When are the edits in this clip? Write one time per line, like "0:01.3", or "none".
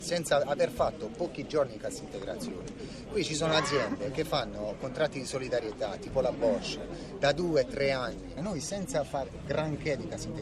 none